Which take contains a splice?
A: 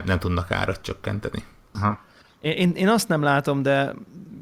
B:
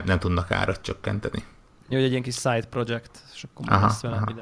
A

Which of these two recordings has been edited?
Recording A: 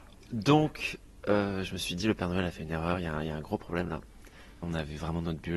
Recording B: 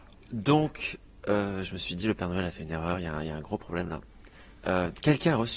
A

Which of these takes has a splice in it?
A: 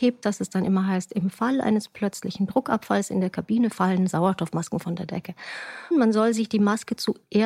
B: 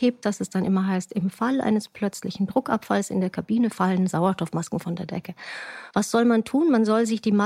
A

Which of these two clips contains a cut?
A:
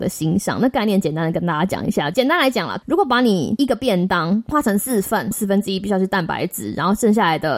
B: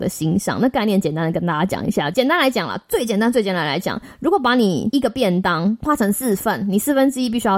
A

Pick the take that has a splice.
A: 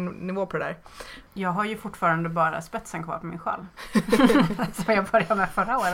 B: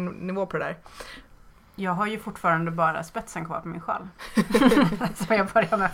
A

